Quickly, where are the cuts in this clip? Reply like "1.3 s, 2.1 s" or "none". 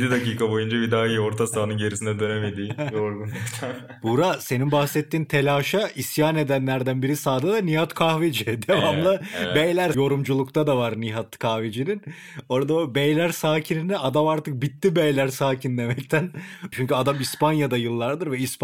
9.9 s, 16.7 s